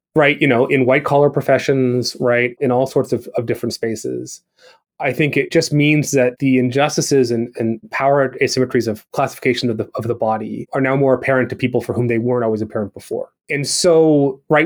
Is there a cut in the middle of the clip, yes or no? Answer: no